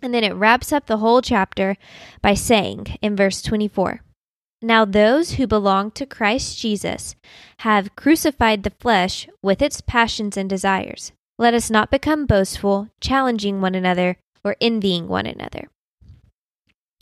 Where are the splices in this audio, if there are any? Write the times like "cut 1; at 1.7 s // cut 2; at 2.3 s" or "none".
cut 1; at 11.3 s